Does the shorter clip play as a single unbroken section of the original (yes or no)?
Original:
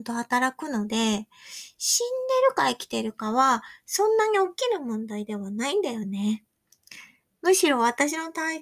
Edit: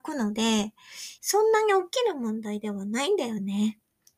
no